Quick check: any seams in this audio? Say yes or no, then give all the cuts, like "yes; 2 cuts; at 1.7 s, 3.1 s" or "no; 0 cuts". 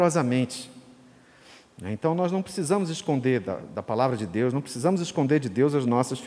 yes; 1 cut; at 3.6 s